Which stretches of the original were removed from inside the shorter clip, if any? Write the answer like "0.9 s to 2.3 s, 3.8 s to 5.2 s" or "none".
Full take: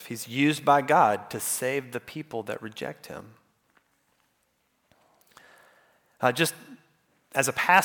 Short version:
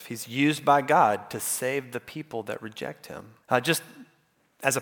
3.4 s to 6.1 s